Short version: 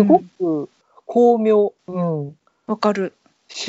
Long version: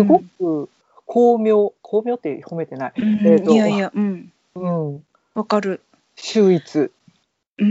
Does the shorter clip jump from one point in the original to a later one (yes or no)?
yes